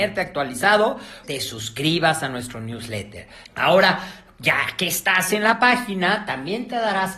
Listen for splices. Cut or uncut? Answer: cut